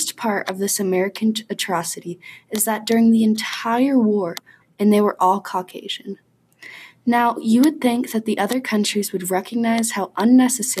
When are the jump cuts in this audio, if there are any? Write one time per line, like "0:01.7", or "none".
0:04.6